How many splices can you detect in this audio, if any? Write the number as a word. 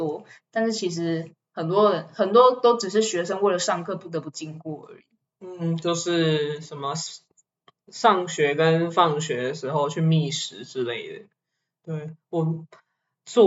zero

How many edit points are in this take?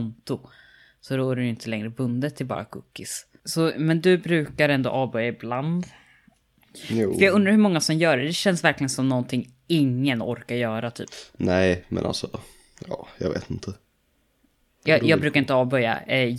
zero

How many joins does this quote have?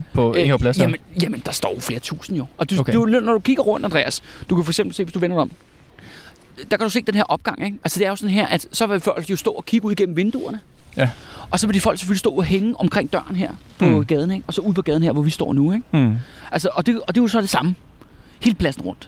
zero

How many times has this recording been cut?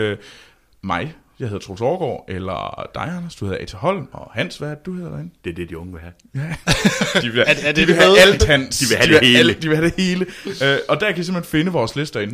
one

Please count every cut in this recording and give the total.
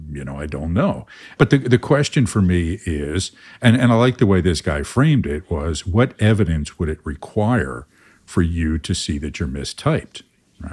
one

